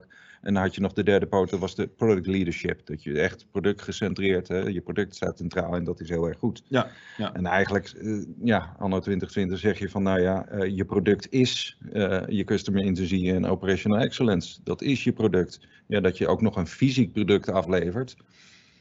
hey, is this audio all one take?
yes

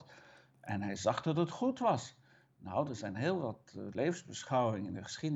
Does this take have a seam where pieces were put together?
no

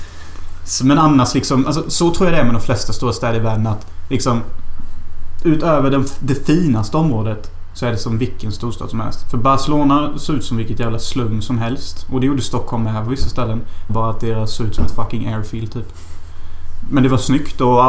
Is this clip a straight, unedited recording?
no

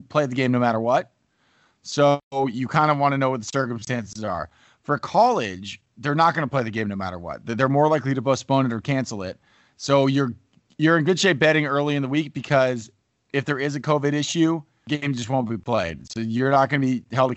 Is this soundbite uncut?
yes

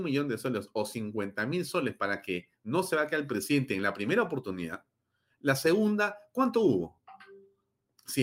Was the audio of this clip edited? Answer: no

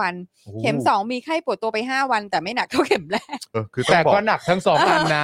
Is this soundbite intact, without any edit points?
no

